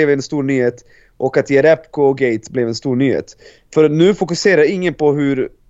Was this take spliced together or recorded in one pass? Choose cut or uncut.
uncut